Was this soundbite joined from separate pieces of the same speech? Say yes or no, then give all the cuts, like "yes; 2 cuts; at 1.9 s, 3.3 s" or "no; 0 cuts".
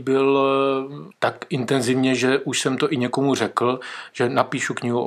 yes; 1 cut; at 1.1 s